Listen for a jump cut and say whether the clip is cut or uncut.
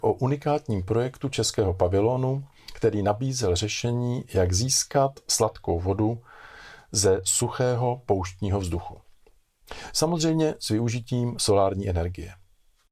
uncut